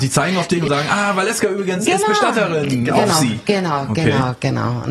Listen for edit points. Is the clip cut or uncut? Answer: uncut